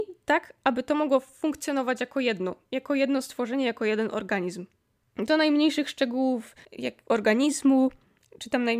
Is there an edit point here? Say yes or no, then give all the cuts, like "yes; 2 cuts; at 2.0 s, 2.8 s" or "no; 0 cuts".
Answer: yes; 2 cuts; at 5.0 s, 6.6 s